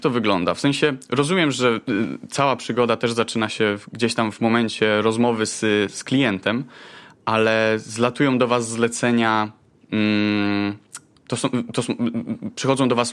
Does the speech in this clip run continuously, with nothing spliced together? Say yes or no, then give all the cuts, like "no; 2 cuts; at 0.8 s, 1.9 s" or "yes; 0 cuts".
yes; 0 cuts